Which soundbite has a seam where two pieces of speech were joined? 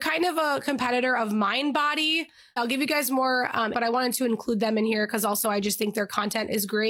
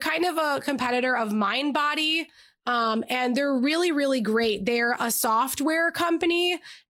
first; 2 cuts; at 2.6 s, 3.7 s

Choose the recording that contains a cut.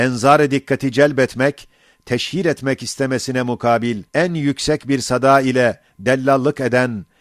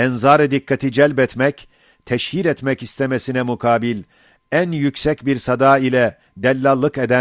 first; 1 cut; at 4.1 s

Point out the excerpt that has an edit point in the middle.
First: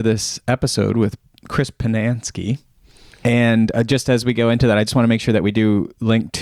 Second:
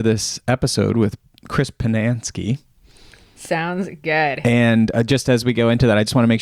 first; 1 cut; at 3.2 s

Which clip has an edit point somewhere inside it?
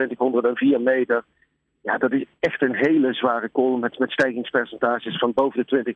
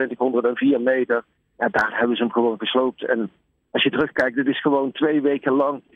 second; 1 cut; at 1.4 s

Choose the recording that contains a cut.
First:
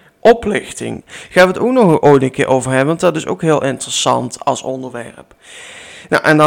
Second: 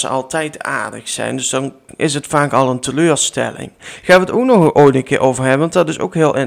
first; 1 cut; at 1.0 s

